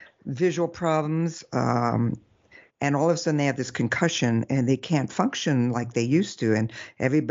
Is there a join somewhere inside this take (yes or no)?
no